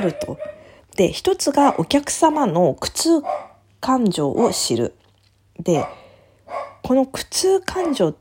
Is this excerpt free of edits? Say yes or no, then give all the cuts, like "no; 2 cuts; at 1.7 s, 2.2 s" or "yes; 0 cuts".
yes; 0 cuts